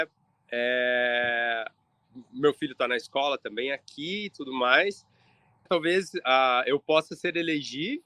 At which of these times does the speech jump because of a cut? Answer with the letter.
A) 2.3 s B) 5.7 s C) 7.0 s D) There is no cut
B